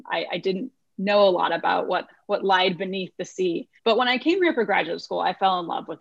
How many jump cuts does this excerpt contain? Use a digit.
1